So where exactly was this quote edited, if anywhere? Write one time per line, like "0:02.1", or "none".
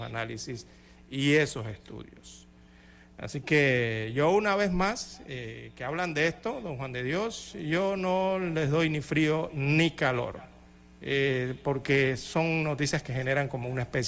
none

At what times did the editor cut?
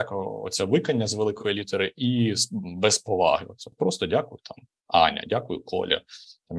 none

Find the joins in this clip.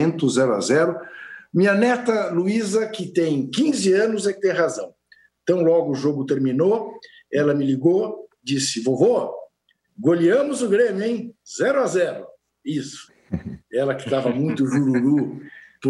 none

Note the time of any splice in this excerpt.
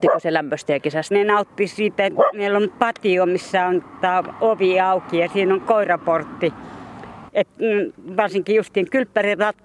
0:01.1
0:07.3

